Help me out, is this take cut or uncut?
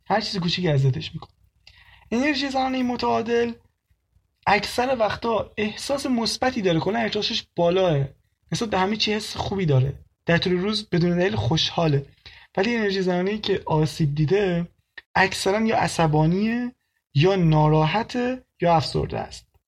cut